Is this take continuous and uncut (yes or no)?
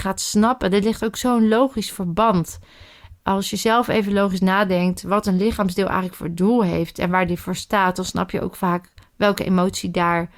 yes